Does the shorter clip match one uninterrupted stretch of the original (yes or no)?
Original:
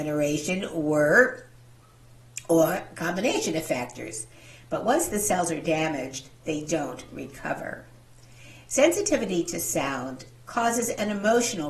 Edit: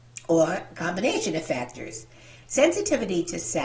no